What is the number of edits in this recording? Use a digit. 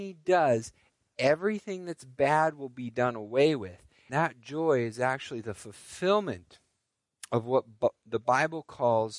1